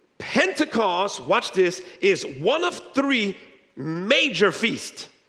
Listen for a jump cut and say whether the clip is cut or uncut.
uncut